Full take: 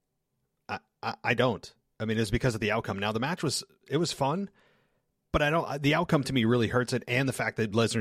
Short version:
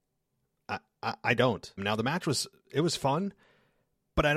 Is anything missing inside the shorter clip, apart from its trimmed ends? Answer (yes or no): yes